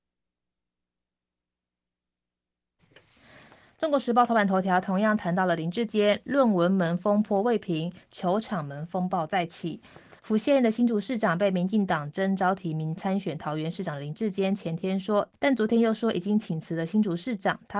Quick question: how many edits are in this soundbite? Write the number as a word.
two